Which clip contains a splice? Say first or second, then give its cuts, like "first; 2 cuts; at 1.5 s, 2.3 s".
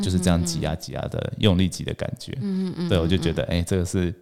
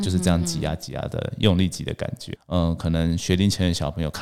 second; 1 cut; at 2.3 s